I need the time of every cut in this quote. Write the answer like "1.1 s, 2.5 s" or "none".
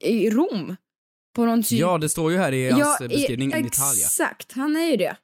3.5 s